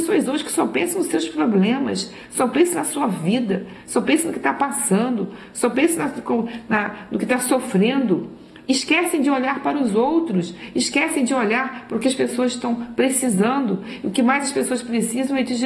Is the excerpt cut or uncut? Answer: uncut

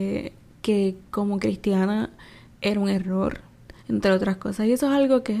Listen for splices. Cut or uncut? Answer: cut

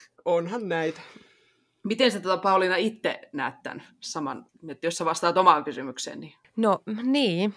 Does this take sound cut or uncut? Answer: uncut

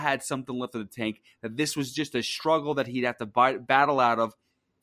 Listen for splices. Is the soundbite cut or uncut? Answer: uncut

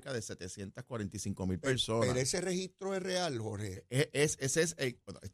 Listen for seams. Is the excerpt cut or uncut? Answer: uncut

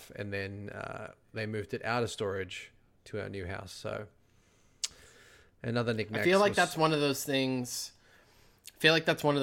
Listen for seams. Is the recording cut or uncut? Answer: uncut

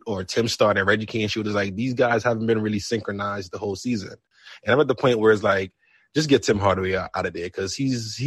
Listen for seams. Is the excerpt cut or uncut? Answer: uncut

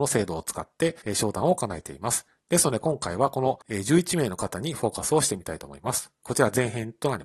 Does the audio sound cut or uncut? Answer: cut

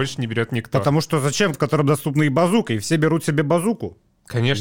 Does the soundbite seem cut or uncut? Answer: cut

